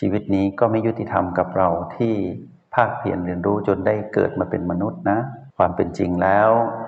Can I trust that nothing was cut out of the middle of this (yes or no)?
no